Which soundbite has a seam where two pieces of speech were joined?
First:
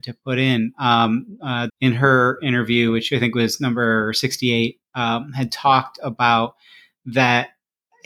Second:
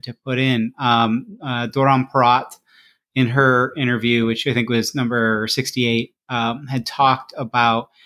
first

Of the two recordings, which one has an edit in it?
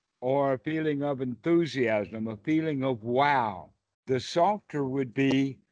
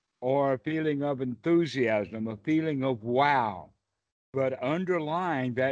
first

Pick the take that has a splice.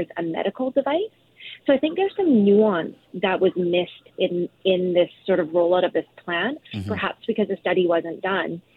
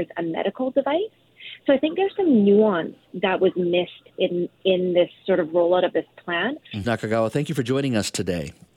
second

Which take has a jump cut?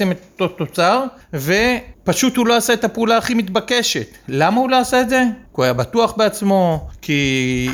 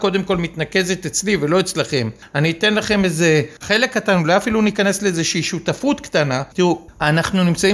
second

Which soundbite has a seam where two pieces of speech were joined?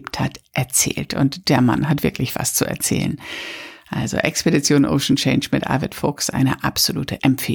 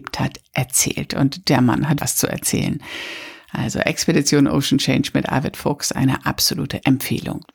second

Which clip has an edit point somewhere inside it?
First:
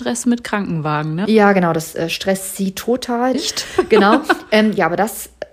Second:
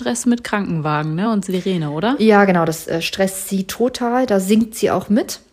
first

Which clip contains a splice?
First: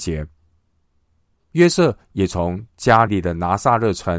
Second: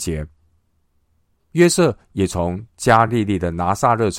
first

